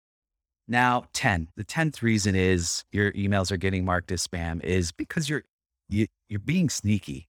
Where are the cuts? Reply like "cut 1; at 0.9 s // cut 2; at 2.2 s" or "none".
cut 1; at 1.5 s // cut 2; at 5.0 s